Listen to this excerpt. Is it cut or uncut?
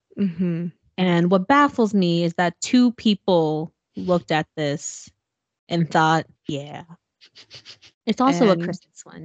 cut